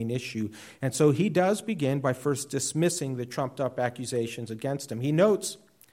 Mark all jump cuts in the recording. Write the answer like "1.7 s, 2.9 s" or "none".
none